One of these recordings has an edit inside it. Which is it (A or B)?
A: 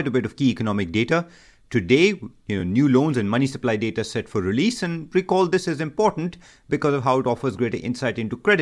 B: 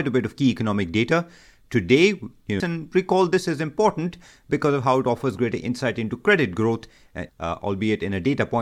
B